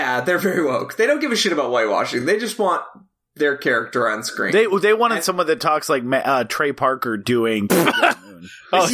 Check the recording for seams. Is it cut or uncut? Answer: uncut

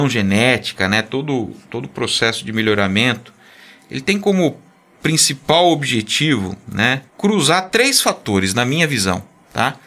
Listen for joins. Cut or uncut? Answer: cut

